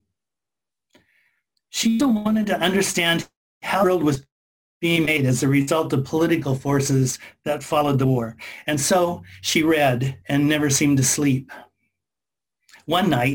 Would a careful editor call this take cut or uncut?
cut